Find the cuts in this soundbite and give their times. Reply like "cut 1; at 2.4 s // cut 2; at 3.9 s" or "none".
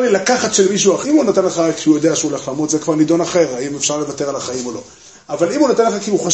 cut 1; at 1.0 s